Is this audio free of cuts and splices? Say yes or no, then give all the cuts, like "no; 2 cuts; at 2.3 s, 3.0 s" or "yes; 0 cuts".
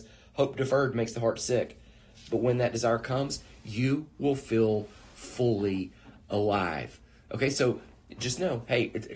yes; 0 cuts